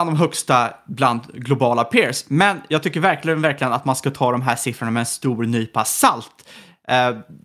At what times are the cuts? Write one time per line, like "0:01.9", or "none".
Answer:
none

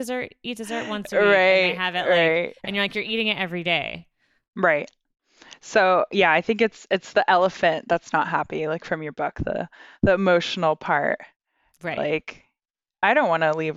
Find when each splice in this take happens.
0:04.5

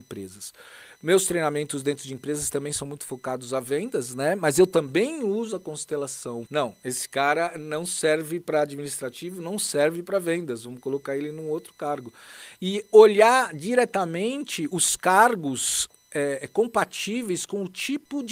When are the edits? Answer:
0:06.5

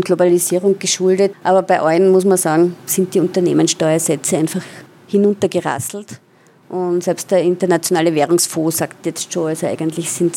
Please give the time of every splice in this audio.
none

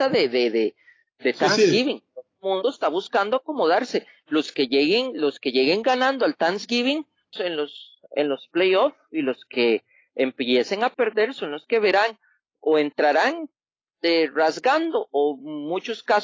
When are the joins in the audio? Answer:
0:07.3

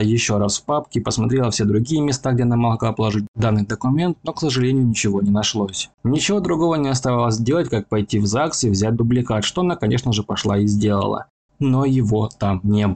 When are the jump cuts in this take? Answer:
0:05.9
0:11.5

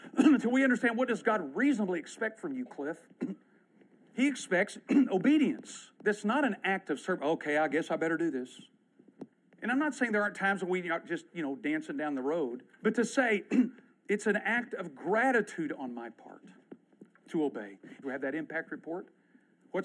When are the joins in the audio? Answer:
0:06.0
0:12.7
0:18.0

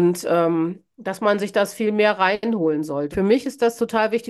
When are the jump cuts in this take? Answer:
0:03.1

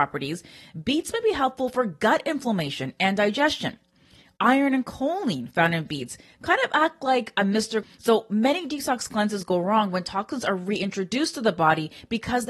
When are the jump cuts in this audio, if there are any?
0:07.8

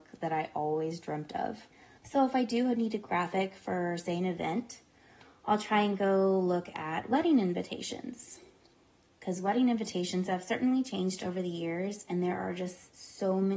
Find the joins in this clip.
0:02.0

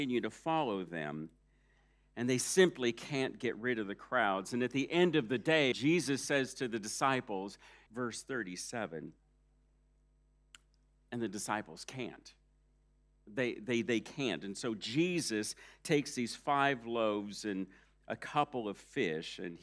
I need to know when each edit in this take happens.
0:05.7
0:07.9

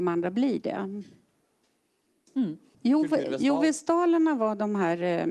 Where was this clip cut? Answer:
0:02.7

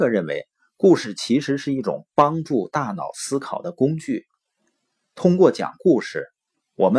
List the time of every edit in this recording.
none

